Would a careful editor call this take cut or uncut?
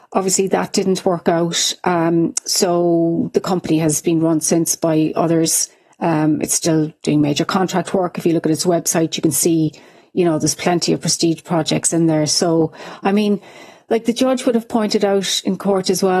uncut